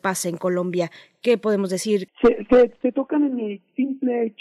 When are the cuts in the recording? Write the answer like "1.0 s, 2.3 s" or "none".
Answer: 2.1 s